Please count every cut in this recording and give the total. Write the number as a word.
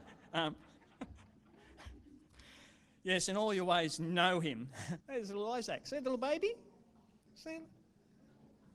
two